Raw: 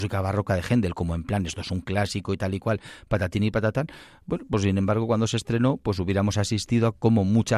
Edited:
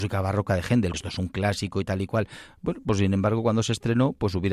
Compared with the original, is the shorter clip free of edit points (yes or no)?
no